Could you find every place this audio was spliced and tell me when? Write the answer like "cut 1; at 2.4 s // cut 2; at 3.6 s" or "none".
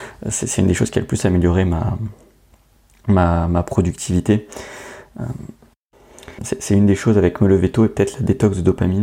cut 1; at 6.4 s